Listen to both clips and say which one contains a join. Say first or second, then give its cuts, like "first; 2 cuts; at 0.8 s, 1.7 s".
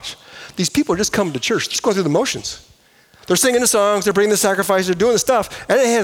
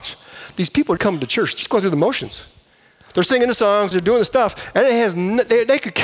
second; 2 cuts; at 1.0 s, 3.9 s